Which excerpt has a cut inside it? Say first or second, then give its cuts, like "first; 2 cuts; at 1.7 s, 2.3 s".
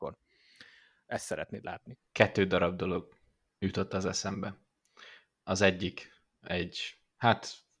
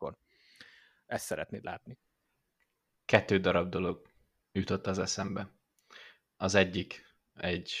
first; 1 cut; at 2.1 s